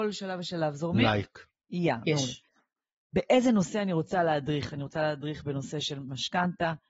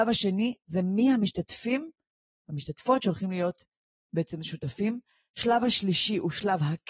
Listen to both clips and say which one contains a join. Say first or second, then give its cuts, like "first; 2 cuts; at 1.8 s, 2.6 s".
first; 1 cut; at 3.0 s